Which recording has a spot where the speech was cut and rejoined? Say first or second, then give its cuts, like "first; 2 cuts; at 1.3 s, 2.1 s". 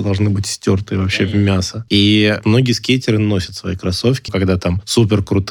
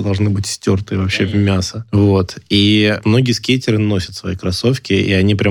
first; 2 cuts; at 1.9 s, 4.3 s